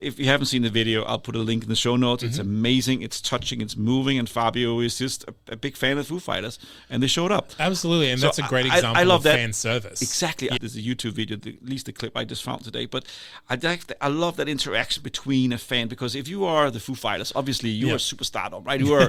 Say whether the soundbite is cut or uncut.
cut